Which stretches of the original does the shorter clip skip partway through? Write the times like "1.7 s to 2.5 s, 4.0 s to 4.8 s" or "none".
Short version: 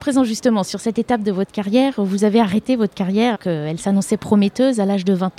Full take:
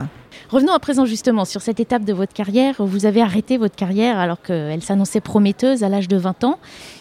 4.2 s to 4.4 s